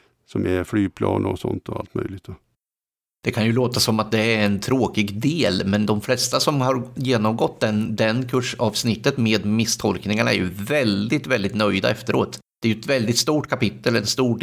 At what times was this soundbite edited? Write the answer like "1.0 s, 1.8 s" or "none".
none